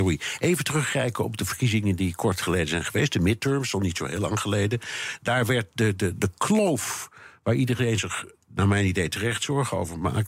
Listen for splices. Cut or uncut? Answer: uncut